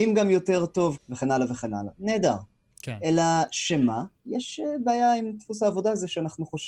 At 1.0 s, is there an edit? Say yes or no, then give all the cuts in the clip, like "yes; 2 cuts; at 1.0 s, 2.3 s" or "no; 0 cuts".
yes; 2 cuts; at 1.0 s, 4.2 s